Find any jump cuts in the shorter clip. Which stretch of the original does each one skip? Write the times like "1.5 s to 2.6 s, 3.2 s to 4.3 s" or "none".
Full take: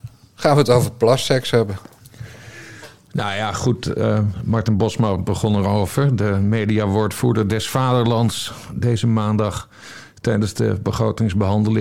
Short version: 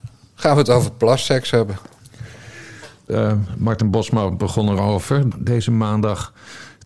3.1 s to 3.9 s, 6.2 s to 8.7 s